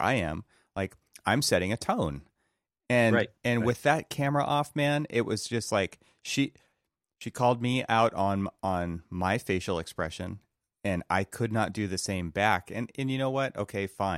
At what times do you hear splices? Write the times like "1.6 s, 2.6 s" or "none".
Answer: none